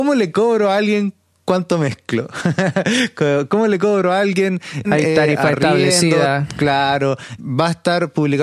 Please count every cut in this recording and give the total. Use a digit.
2